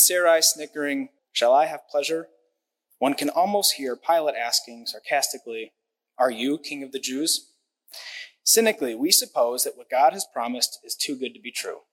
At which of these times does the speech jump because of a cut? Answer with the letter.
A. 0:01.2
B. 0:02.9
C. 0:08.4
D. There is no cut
A